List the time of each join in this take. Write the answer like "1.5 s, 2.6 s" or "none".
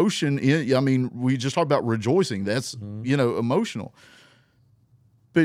none

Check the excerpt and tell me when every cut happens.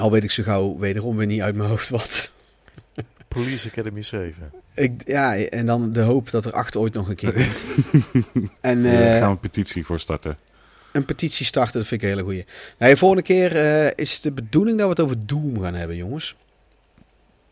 8.6 s

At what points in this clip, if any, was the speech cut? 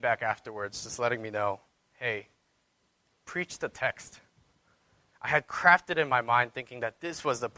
5.1 s

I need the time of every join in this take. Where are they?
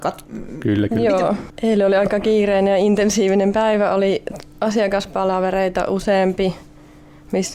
1.5 s

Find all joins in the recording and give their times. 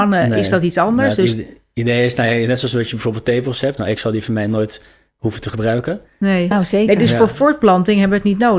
3.8 s, 6.5 s

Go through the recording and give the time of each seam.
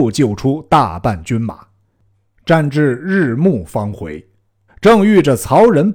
4.7 s

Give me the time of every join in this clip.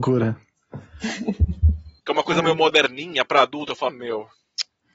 2.0 s, 3.9 s

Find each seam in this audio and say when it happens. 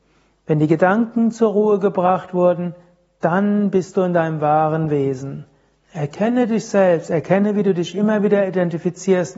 5.8 s

